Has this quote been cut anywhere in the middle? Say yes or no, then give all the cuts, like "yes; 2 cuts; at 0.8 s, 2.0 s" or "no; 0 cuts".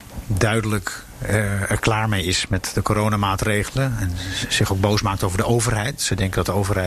no; 0 cuts